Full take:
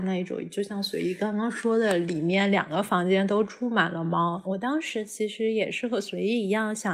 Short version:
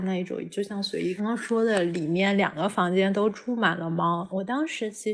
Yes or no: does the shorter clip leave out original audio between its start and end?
yes